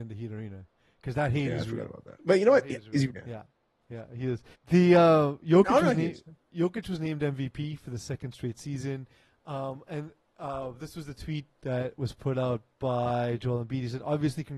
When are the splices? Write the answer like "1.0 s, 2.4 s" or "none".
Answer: 3.1 s, 4.5 s